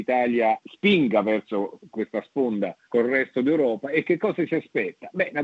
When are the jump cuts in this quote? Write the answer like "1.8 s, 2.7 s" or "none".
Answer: 2.8 s